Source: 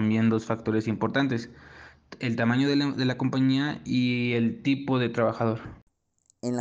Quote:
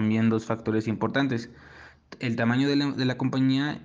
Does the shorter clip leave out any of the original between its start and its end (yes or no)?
no